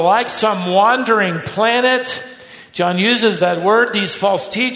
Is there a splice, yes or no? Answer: no